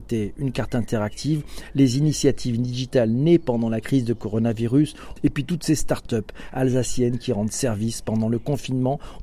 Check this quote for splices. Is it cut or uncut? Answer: cut